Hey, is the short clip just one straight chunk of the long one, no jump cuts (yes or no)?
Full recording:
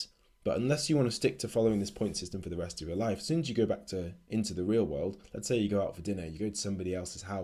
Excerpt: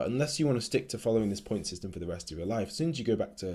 yes